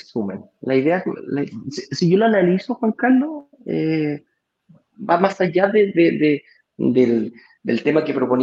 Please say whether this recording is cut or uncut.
uncut